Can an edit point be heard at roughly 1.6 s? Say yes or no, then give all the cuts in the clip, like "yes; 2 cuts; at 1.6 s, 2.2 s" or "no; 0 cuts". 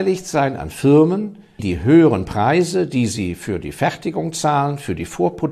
yes; 1 cut; at 1.6 s